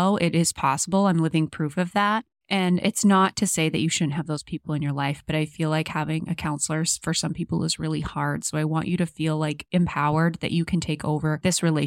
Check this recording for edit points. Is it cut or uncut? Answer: uncut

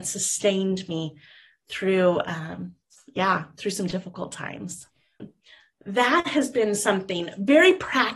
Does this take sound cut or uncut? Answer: cut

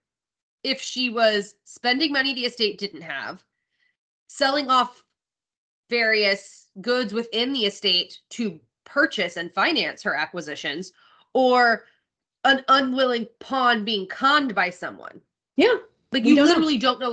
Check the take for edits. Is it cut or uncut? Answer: uncut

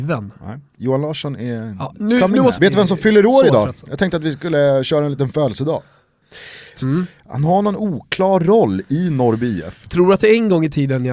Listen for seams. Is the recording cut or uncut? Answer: cut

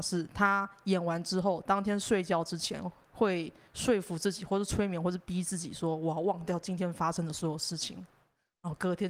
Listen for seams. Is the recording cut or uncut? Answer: uncut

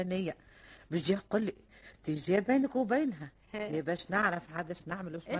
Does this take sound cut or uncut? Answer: uncut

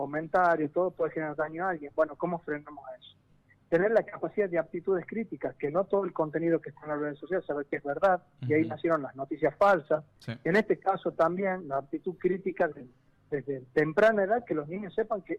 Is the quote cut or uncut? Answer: uncut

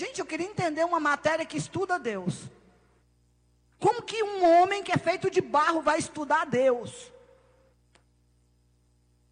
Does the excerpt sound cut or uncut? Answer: uncut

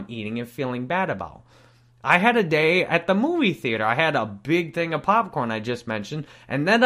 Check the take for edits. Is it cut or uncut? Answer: uncut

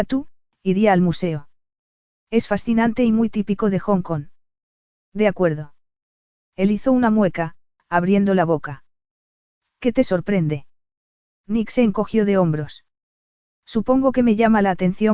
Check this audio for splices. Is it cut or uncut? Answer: uncut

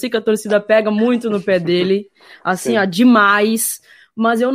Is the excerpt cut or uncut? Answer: uncut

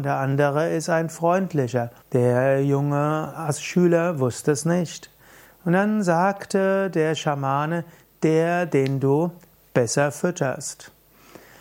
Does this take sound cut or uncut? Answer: cut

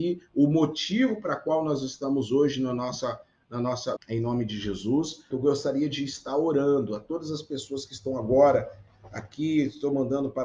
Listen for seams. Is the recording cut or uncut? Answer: cut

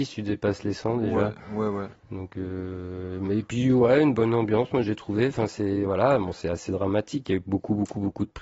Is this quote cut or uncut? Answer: uncut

